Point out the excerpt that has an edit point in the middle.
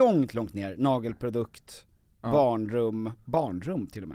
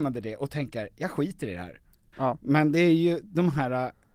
second; 1 cut; at 2.1 s

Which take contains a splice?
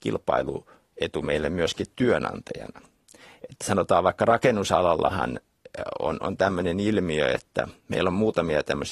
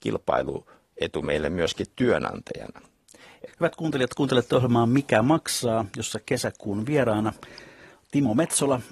second; 1 cut; at 3.5 s

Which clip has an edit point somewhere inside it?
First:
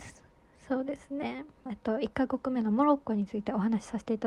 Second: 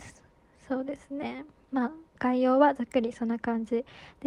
first; 1 cut; at 1.7 s

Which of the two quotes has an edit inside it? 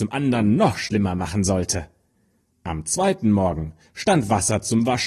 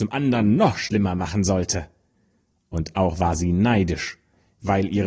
first; 1 cut; at 2.5 s

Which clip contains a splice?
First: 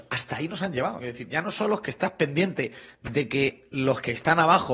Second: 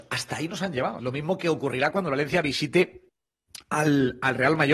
second; 1 cut; at 1.0 s

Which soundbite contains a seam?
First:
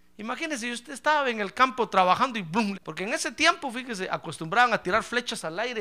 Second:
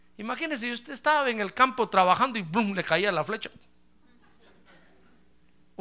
first; 1 cut; at 2.7 s

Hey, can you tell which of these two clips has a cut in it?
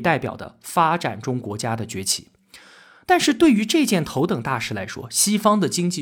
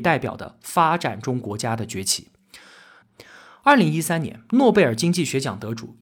second; 1 cut; at 3.0 s

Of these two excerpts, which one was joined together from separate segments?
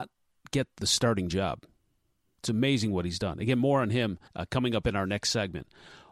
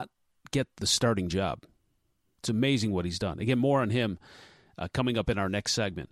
first; 1 cut; at 4.3 s

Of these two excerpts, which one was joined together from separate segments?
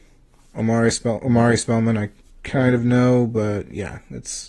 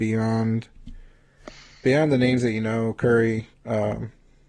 second; 1 cut; at 3.5 s

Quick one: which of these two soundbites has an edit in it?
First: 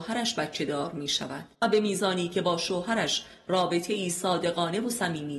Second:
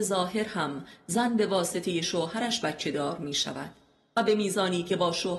first; 1 cut; at 1.5 s

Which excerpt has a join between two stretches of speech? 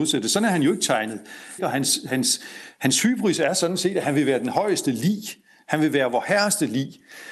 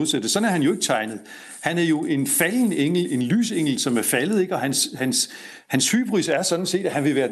first; 1 cut; at 1.6 s

